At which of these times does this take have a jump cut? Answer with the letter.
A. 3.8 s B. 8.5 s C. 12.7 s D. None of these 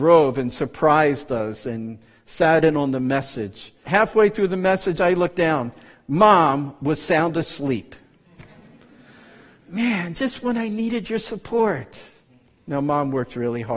A